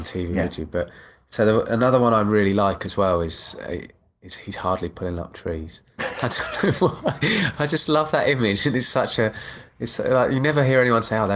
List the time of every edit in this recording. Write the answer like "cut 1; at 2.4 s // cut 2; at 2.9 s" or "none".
none